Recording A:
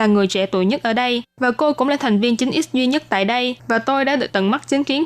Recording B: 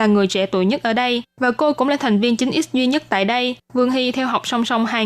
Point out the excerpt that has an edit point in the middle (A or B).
A